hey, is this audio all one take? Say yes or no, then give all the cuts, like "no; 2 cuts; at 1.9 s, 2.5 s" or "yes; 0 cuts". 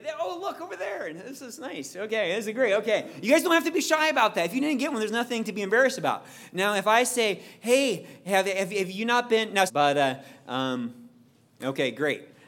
no; 1 cut; at 9.7 s